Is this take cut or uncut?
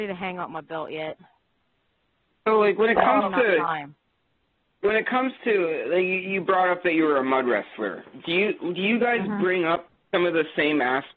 uncut